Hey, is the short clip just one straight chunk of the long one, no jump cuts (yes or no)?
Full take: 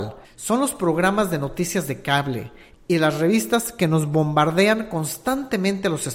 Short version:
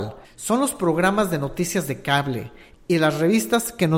yes